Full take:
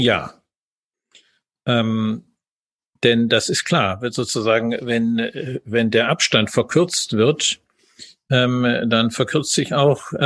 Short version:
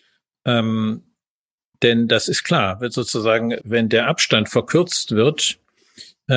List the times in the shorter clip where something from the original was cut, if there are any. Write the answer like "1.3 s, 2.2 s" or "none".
3.6 s